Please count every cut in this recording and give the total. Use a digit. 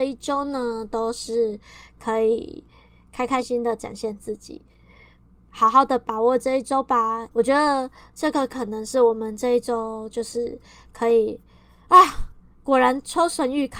2